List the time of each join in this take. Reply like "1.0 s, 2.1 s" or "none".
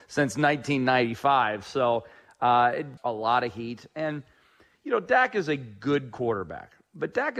3.0 s